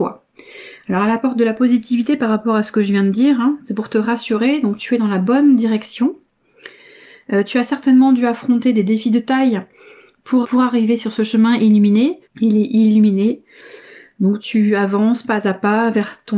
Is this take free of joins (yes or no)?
no